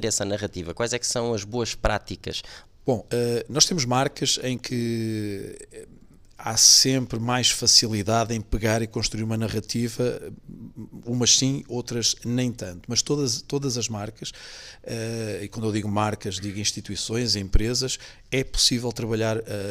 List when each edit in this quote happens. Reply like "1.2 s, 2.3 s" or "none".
2.7 s